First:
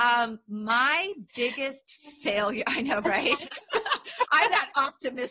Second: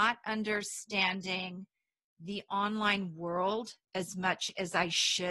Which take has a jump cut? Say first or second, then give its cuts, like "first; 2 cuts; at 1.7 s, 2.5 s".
first; 1 cut; at 3.6 s